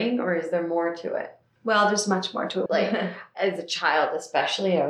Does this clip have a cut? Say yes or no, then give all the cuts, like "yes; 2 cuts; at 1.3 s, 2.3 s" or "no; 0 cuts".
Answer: yes; 1 cut; at 2.7 s